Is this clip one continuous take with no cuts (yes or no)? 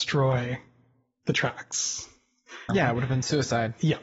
no